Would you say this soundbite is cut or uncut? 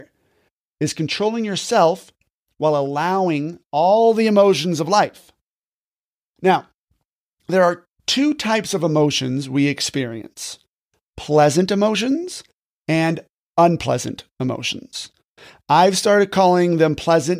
uncut